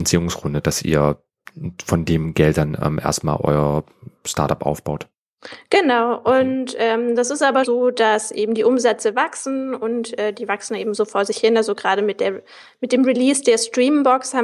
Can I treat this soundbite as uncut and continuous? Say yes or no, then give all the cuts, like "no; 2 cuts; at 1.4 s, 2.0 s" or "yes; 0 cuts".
no; 1 cut; at 7.6 s